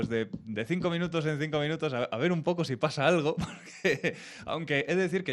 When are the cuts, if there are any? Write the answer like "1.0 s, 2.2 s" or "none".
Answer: none